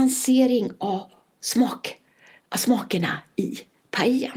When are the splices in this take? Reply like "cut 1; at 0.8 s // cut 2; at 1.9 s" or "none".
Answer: none